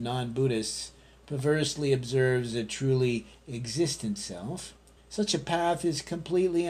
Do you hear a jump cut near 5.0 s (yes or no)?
yes